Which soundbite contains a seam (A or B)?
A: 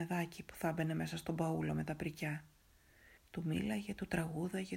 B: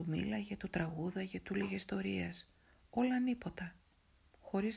A